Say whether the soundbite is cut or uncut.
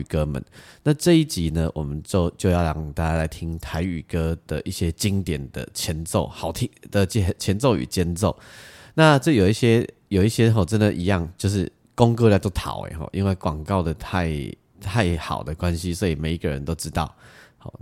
uncut